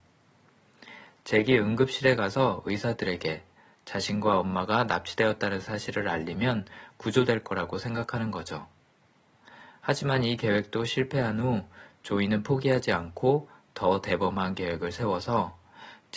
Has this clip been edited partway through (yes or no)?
no